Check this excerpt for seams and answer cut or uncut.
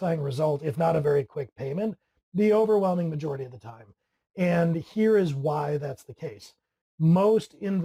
uncut